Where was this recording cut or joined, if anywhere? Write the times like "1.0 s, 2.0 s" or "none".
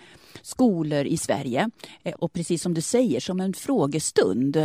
2.1 s